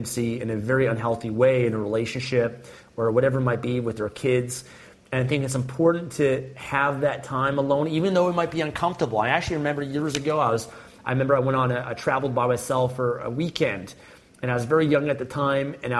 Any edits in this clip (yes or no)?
no